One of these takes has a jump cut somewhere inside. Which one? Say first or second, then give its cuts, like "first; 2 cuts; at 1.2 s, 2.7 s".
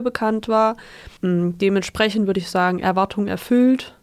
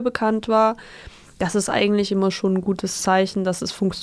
first; 1 cut; at 1.2 s